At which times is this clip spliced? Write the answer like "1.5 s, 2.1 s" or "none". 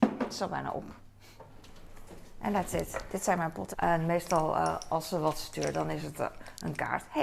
3.7 s